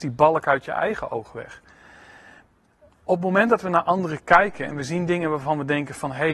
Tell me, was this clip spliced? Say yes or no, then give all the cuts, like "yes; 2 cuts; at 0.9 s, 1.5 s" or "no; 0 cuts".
no; 0 cuts